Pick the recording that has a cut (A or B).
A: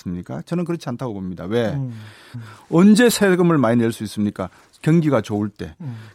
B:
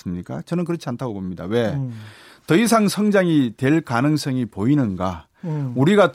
A